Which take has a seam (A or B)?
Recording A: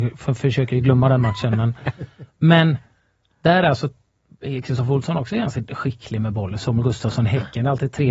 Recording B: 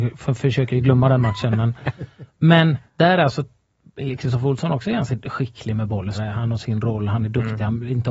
B